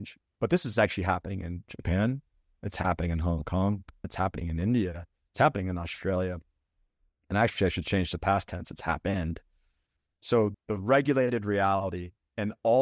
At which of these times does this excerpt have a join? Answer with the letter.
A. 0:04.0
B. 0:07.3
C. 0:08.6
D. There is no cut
A